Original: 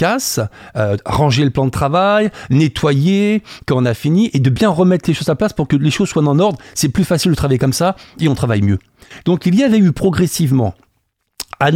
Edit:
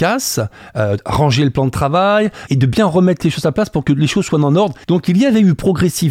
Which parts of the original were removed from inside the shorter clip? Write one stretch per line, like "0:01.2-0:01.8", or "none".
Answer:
0:02.5-0:04.3
0:06.7-0:09.2